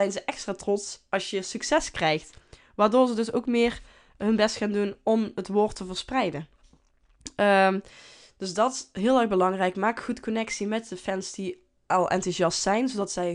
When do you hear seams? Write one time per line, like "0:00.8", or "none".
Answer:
none